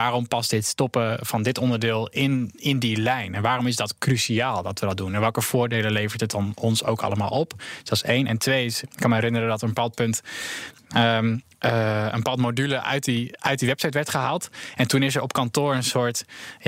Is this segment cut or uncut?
uncut